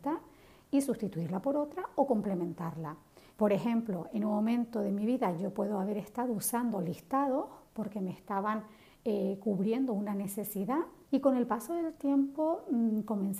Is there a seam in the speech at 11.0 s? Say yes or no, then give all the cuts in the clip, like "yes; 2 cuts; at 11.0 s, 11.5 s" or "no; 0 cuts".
yes; 2 cuts; at 3.3 s, 11.0 s